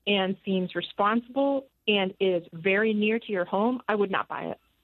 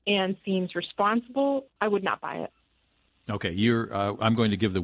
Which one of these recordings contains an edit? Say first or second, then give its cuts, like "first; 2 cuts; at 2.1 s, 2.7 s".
second; 1 cut; at 1.8 s